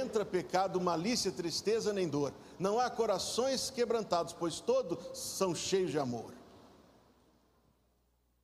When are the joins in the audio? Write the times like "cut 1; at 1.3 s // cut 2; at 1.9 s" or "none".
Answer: none